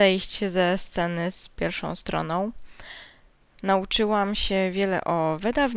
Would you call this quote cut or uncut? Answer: cut